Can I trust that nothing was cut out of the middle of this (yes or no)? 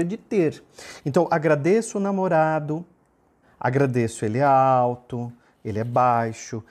no